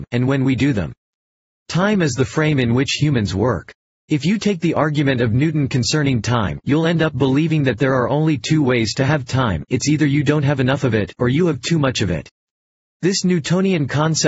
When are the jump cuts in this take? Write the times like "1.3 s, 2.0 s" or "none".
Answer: none